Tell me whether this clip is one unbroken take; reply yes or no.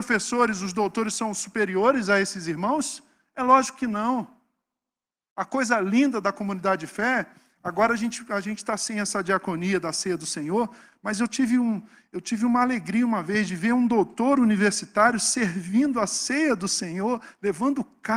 yes